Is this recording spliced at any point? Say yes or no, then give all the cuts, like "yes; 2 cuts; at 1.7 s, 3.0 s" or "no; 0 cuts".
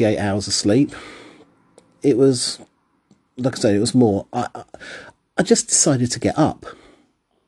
no; 0 cuts